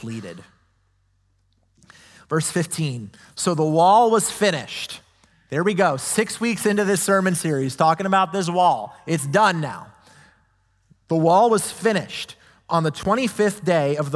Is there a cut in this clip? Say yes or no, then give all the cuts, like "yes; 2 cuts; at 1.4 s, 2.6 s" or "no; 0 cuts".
no; 0 cuts